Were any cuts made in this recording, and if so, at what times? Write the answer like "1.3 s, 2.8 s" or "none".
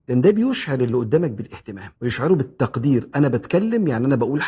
2.0 s

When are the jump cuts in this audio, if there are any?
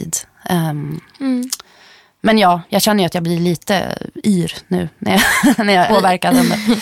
5.9 s

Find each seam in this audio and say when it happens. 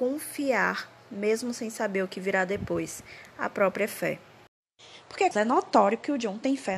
5.3 s

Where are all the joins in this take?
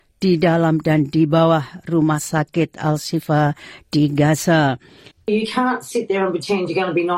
5.1 s

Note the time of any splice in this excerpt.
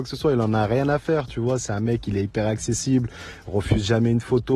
none

